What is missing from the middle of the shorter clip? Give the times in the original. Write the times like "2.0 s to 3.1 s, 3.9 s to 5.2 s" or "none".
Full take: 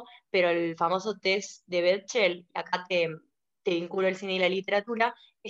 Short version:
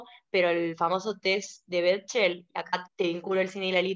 2.9 s to 3.5 s